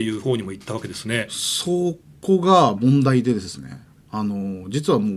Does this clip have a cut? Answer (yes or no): no